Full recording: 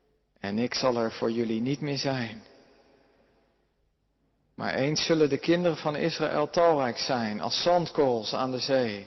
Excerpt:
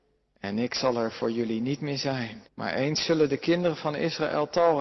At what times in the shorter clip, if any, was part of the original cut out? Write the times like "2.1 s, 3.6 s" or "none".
2.5 s